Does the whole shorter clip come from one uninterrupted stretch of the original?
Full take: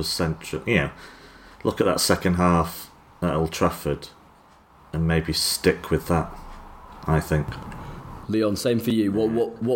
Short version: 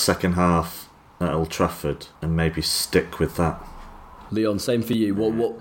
no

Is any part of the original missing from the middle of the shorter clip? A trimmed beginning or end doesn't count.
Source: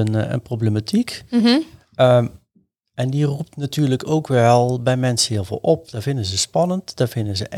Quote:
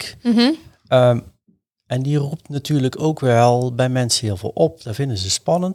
no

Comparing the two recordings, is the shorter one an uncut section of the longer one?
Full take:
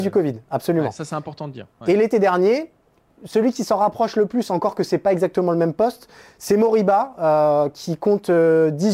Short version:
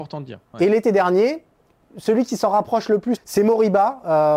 no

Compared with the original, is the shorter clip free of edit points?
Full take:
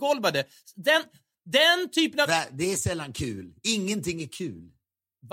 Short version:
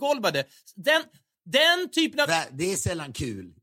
yes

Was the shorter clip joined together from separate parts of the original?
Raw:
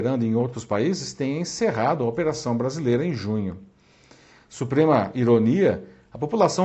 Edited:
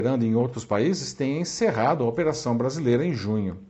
no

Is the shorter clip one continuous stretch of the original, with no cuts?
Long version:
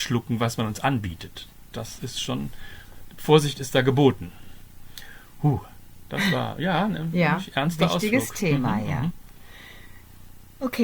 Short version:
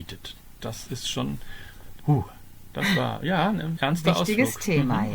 no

